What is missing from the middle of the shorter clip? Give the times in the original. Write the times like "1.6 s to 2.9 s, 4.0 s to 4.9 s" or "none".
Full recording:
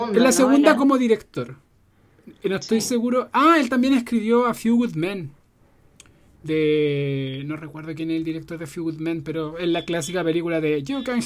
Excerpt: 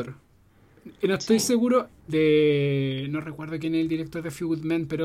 3.3 s to 6.2 s